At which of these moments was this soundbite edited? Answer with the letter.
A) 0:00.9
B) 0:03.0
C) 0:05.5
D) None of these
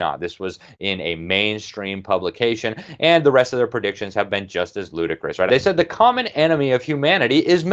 C